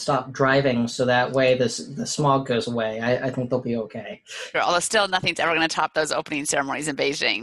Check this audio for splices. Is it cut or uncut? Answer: cut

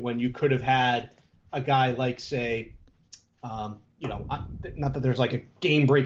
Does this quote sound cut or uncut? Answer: cut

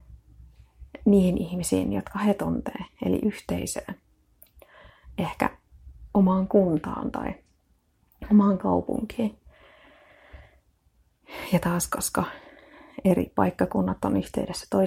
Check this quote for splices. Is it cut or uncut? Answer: uncut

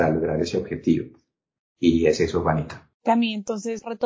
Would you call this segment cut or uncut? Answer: cut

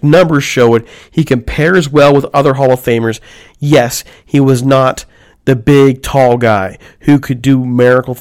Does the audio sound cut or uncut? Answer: uncut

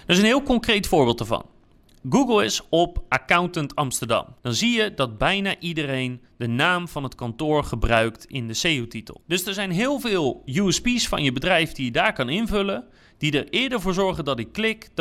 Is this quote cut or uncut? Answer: cut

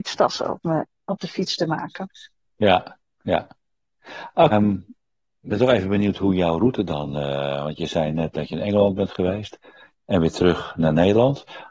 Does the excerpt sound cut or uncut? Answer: cut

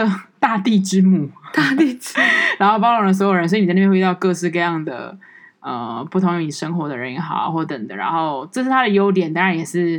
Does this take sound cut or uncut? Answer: cut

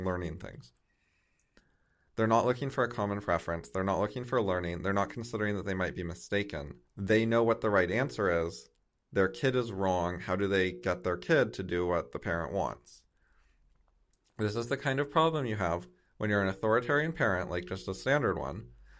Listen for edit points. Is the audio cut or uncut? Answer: cut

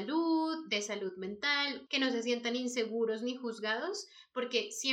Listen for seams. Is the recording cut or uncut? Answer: cut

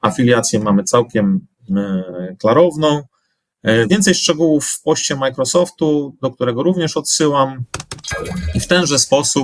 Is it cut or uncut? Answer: uncut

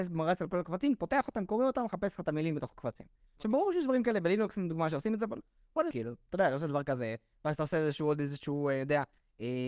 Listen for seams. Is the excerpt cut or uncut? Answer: cut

